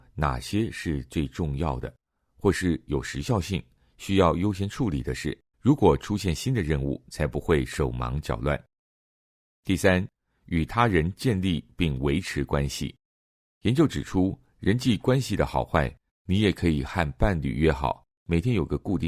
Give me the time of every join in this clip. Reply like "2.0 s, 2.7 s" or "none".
5.5 s, 16.1 s